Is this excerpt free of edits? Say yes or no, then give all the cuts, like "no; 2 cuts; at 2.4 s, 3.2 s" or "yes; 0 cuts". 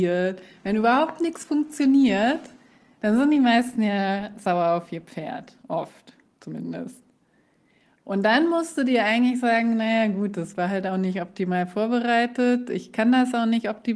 yes; 0 cuts